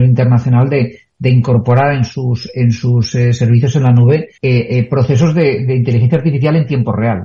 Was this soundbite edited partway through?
yes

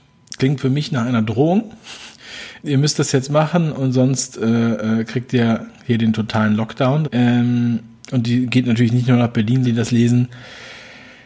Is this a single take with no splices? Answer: no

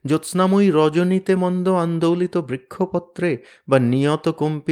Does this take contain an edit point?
yes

